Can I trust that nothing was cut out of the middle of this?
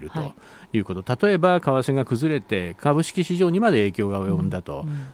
yes; 0 cuts

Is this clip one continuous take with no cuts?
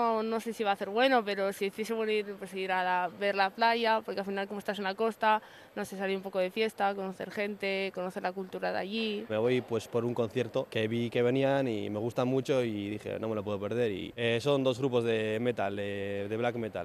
yes; 0 cuts

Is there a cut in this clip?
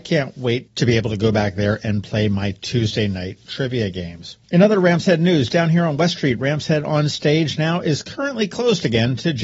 no; 0 cuts

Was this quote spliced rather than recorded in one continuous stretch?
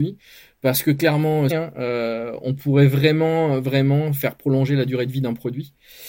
yes; 1 cut; at 1.5 s

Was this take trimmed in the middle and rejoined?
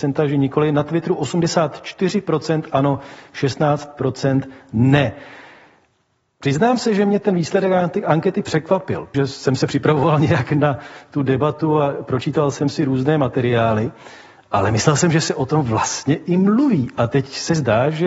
yes; 1 cut; at 9.1 s

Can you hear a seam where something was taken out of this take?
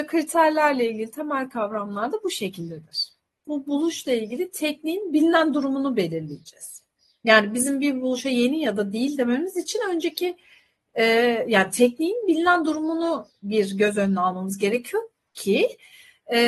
yes; 1 cut; at 3.4 s

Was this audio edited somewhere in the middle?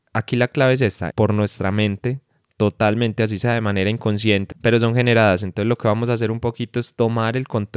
yes; 2 cuts; at 1.1 s, 4.5 s

